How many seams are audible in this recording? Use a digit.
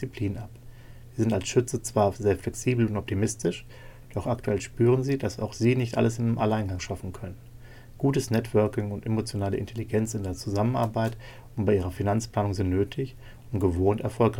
0